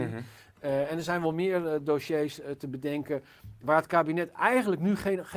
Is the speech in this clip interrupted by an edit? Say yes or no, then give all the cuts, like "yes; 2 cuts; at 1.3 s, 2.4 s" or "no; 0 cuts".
no; 0 cuts